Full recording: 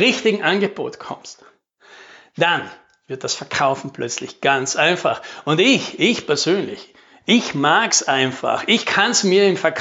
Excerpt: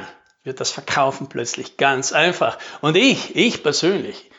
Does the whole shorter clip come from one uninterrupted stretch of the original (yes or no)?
yes